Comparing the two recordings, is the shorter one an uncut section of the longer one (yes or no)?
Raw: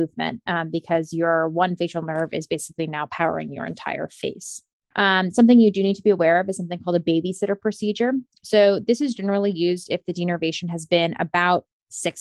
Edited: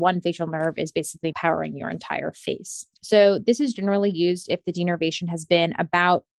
no